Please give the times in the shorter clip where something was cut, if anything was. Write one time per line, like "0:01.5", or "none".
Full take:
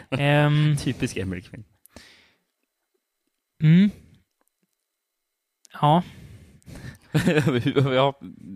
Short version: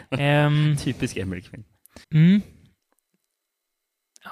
0:02.0